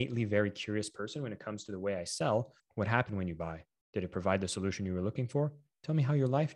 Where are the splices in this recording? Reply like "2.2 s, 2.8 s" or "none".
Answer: 2.6 s